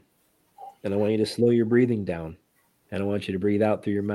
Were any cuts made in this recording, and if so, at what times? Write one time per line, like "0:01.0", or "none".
0:02.7